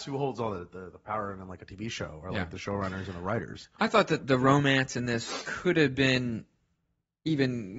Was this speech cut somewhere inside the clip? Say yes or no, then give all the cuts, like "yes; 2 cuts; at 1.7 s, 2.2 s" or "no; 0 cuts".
yes; 1 cut; at 4.2 s